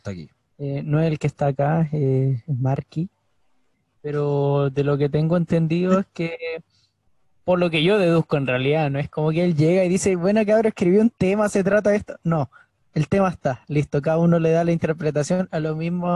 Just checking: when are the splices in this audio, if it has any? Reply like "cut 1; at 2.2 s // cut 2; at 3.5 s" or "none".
none